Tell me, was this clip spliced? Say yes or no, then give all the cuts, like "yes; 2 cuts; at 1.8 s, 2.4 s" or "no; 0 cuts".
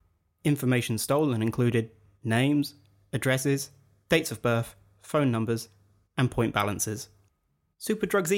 no; 0 cuts